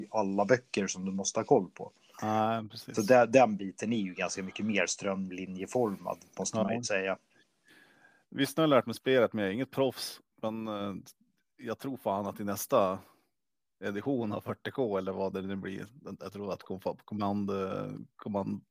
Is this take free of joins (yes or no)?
yes